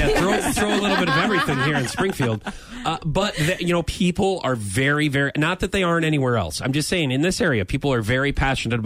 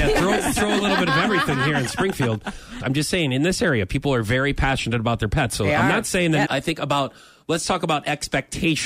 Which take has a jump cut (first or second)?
second